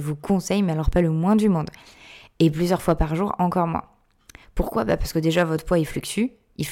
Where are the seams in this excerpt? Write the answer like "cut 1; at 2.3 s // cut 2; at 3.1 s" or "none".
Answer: none